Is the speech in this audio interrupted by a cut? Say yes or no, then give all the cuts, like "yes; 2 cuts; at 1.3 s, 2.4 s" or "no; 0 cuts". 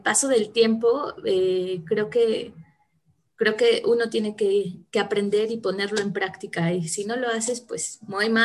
no; 0 cuts